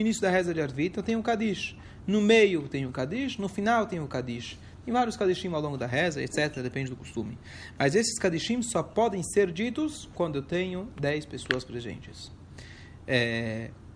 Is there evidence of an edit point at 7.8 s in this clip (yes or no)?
no